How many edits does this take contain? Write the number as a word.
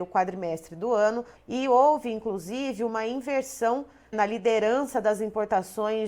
two